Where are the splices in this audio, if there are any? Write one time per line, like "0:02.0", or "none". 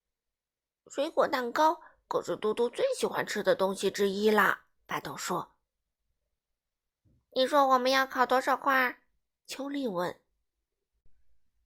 none